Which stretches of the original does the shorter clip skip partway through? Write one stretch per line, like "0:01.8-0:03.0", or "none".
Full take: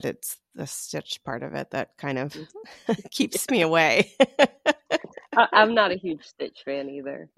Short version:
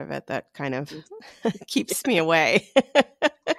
none